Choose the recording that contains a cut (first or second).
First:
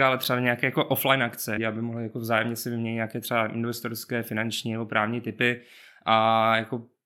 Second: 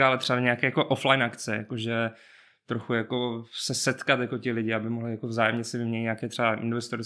first